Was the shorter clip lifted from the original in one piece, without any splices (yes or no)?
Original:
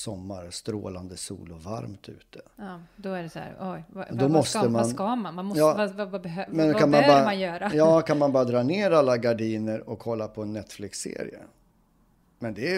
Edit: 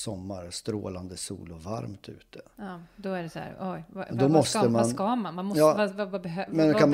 yes